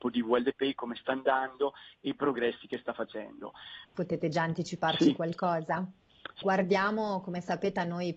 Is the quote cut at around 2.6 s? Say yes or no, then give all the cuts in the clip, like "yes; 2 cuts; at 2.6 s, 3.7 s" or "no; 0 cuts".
no; 2 cuts; at 3.9 s, 6.4 s